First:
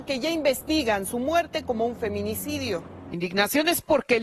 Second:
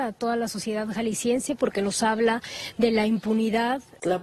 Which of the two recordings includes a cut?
second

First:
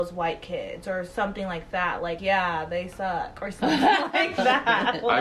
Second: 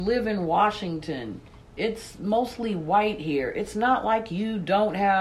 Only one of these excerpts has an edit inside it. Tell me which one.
first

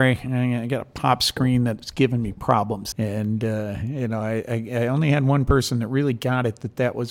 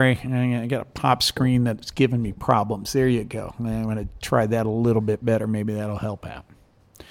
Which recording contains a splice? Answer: first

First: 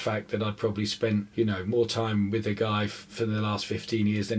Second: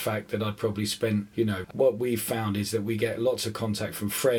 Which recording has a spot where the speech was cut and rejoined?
second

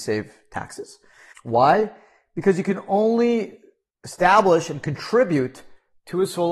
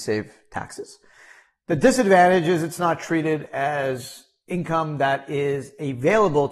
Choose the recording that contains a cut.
first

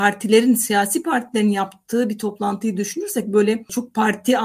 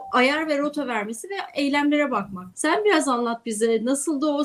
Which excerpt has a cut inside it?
second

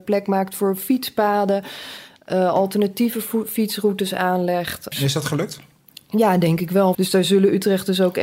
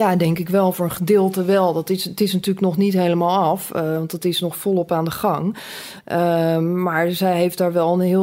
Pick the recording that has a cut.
first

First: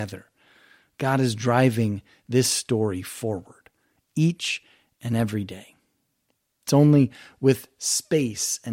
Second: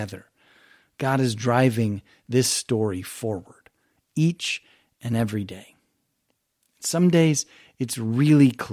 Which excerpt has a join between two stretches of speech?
first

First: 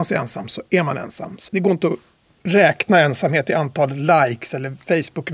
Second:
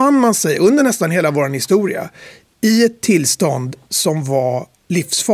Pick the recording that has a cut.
first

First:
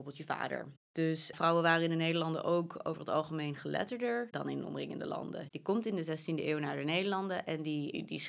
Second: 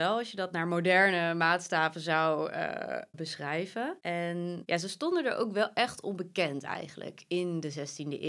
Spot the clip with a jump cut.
first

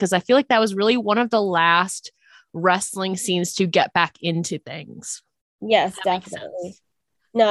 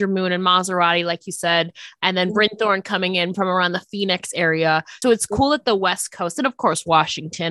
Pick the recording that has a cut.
second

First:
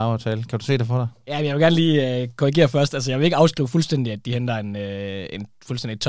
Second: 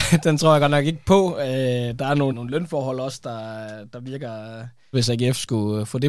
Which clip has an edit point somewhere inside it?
second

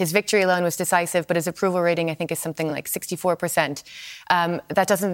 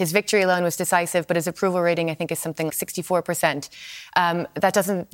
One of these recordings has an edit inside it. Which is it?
second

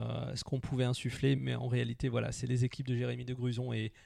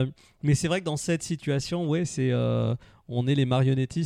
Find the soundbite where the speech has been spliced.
first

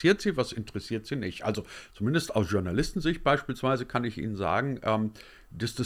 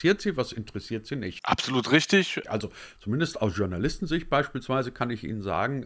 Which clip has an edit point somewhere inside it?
second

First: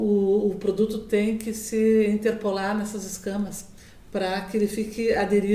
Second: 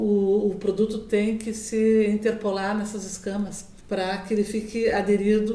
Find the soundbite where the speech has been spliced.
second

